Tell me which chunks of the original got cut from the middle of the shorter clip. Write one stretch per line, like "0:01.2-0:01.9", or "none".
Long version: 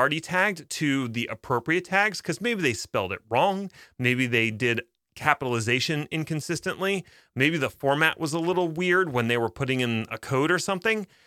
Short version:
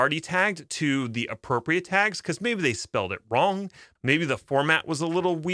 0:04.0-0:07.3